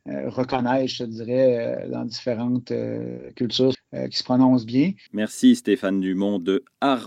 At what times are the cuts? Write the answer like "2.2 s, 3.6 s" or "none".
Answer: 3.7 s, 5.1 s